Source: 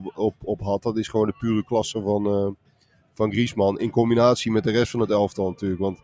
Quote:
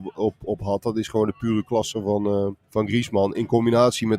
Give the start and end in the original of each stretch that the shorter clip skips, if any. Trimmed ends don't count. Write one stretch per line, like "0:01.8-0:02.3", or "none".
0:02.6-0:03.1